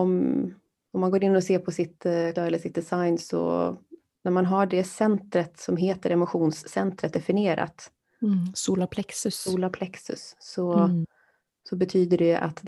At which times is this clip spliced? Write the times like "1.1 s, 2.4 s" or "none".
2.3 s